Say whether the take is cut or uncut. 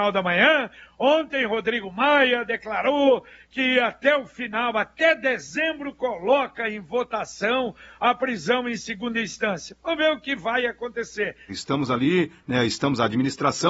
cut